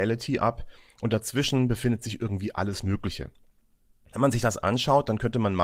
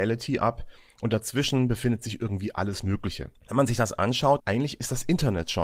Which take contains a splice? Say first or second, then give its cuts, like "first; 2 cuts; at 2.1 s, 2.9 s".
second; 2 cuts; at 3.4 s, 4.4 s